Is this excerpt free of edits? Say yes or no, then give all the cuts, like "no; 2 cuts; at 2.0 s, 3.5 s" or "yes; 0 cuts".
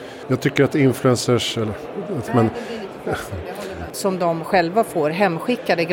no; 2 cuts; at 2.3 s, 3.9 s